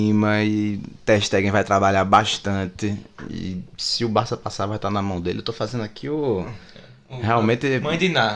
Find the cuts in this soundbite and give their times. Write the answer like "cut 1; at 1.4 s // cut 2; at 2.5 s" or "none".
none